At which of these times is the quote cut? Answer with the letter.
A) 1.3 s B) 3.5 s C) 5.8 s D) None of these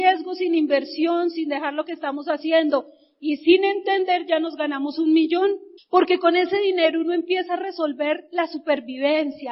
C